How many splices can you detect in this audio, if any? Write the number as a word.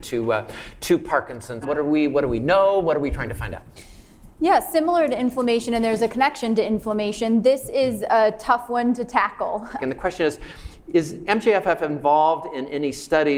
two